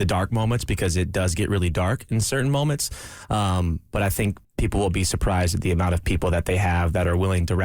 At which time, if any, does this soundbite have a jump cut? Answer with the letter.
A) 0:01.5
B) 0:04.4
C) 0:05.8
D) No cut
B